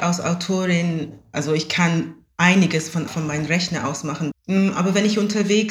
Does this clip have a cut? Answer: yes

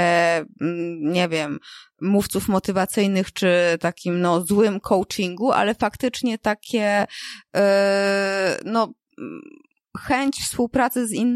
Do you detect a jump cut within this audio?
no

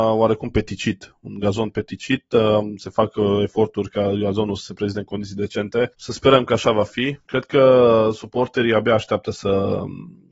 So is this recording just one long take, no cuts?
yes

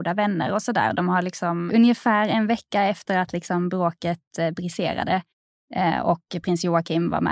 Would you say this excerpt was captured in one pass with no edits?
no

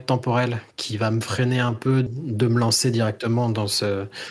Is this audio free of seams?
no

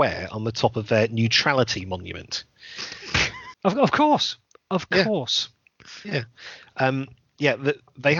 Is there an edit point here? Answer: yes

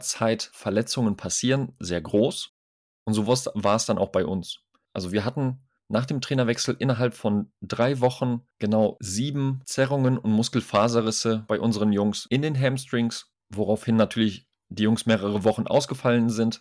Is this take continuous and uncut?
yes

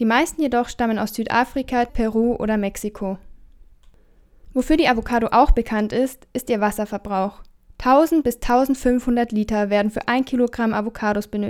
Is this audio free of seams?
no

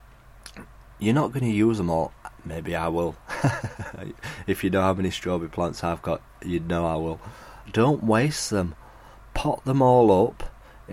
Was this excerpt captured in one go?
no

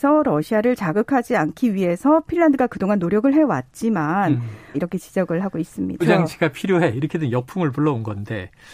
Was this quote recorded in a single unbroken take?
no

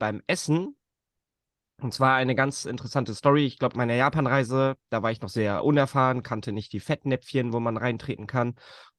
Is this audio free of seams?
no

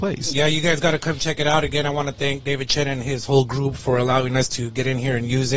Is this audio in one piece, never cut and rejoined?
yes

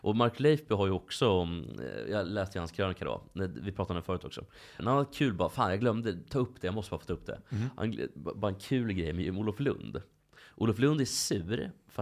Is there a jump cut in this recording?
yes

